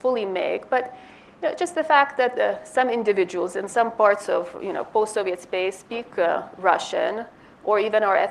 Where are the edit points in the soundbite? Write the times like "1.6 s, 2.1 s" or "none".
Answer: none